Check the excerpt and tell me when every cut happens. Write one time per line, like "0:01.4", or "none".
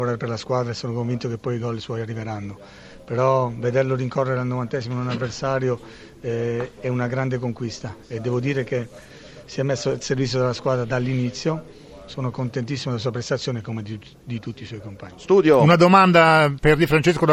none